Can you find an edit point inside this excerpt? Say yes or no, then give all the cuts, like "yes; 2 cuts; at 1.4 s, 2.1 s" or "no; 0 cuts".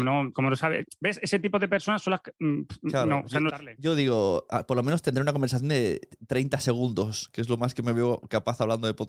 yes; 1 cut; at 3.5 s